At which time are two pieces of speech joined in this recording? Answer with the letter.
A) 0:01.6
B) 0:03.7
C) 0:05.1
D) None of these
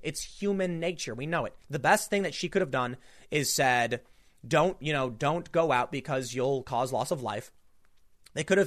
A